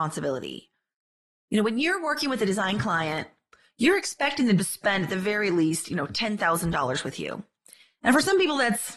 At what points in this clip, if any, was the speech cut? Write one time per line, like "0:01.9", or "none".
none